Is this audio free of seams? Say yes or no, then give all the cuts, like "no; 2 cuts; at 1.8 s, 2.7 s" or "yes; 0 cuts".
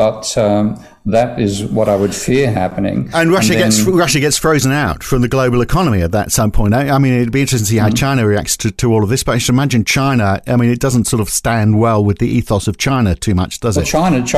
yes; 0 cuts